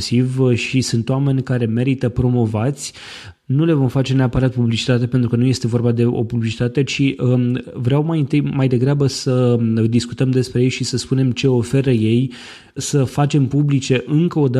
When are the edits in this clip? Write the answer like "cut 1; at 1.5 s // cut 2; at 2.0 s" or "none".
cut 1; at 12.8 s